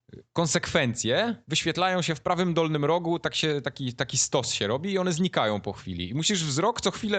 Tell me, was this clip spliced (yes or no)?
no